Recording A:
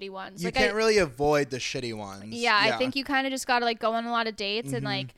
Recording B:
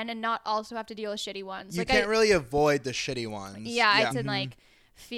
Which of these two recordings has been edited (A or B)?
B